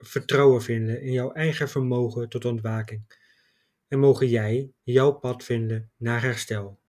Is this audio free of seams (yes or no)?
no